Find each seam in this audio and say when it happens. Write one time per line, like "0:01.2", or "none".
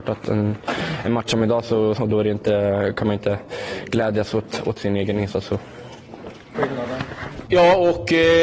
0:02.0
0:06.5